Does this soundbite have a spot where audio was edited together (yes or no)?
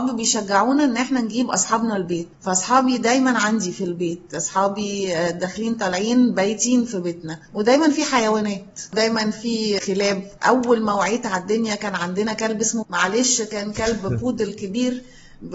yes